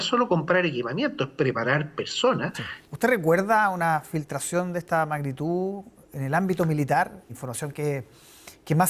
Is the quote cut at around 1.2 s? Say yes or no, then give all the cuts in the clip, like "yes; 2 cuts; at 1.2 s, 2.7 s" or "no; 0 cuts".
no; 2 cuts; at 2.8 s, 7.3 s